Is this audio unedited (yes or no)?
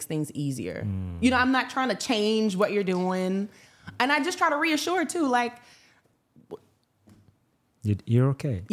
yes